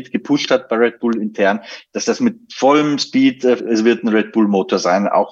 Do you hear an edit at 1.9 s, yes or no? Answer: no